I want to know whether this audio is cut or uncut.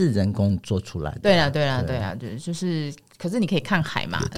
uncut